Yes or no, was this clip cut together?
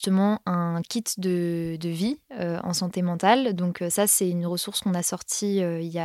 no